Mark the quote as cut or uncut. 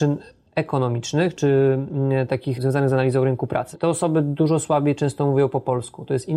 cut